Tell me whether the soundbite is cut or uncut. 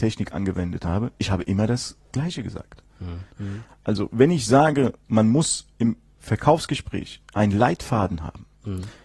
cut